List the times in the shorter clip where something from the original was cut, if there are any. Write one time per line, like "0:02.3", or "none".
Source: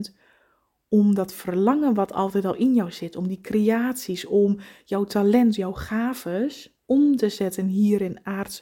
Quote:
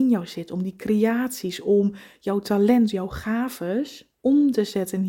none